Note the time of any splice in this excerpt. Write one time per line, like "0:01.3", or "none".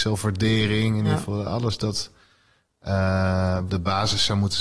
0:03.7